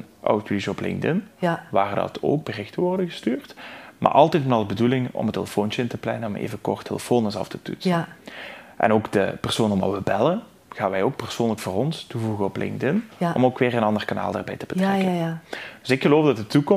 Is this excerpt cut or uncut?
uncut